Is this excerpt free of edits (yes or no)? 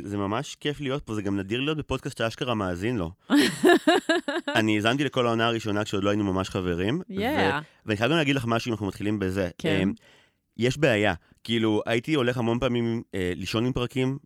yes